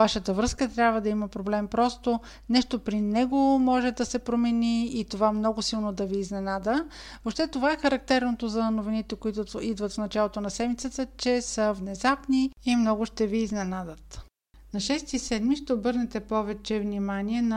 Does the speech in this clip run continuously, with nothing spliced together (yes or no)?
yes